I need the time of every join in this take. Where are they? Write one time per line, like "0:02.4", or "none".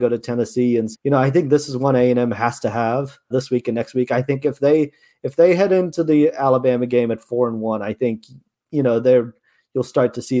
0:00.9
0:03.3